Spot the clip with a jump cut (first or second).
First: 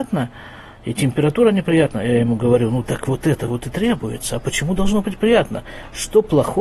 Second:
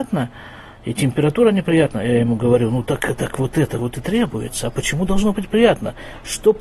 first